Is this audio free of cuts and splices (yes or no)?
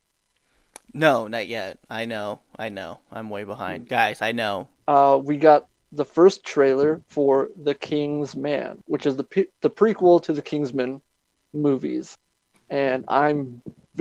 no